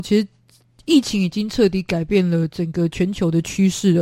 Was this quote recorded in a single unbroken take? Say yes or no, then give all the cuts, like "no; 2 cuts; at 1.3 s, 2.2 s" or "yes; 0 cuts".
yes; 0 cuts